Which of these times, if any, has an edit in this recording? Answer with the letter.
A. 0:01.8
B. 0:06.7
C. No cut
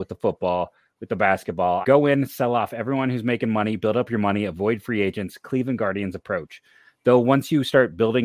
A